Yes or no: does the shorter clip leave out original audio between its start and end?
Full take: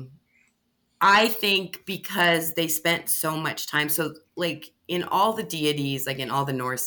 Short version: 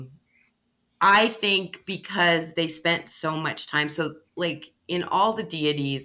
no